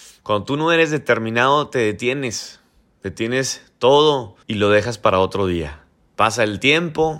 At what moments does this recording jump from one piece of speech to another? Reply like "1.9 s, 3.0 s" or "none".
4.4 s